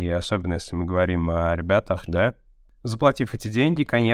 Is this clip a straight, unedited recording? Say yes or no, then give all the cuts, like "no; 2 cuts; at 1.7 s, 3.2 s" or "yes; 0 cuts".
no; 1 cut; at 2.1 s